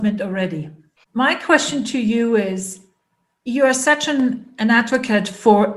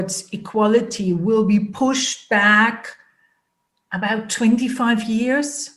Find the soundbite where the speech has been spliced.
first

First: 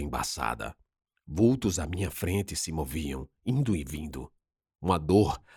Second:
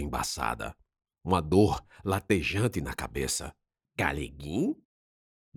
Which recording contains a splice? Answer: second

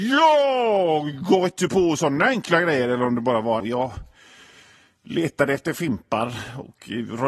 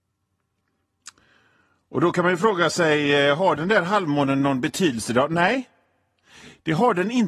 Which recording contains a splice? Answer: first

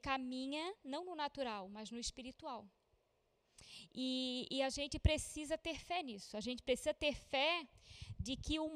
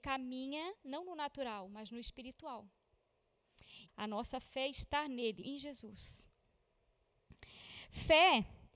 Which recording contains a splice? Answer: second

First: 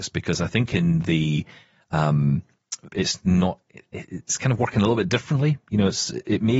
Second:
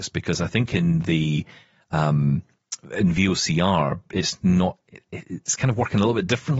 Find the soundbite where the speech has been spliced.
first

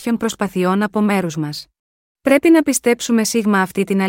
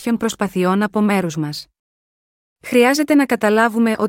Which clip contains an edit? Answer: first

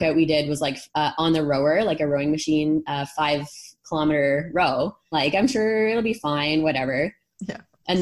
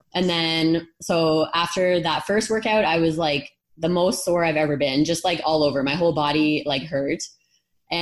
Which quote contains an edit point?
first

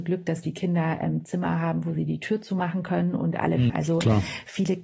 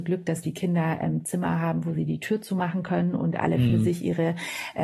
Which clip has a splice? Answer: first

